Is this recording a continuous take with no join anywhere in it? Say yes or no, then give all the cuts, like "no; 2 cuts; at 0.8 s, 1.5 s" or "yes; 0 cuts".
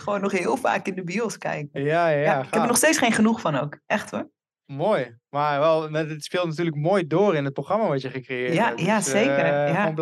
yes; 0 cuts